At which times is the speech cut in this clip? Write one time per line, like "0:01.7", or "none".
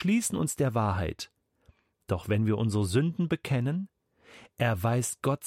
none

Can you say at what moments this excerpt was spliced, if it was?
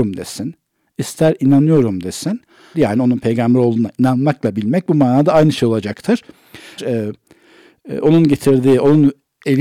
0:02.7
0:06.8

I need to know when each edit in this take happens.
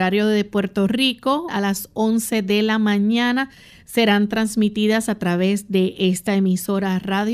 0:01.5

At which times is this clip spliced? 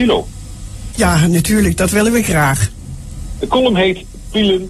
0:00.9
0:03.4

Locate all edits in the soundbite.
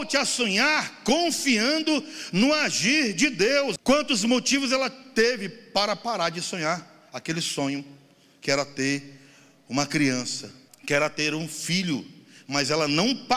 0:03.8
0:10.7

